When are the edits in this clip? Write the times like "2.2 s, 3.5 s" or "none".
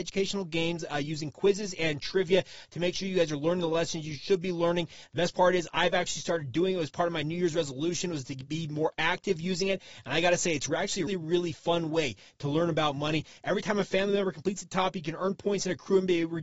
11.1 s